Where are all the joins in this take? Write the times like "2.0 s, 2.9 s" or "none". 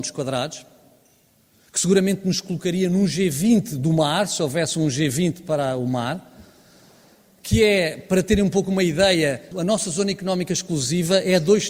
9.5 s